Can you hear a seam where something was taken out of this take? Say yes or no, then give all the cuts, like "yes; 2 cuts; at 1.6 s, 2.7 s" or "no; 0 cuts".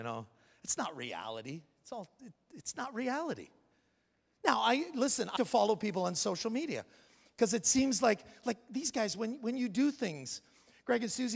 yes; 1 cut; at 5.4 s